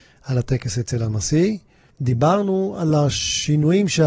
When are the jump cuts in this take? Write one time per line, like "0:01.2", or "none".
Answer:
0:01.9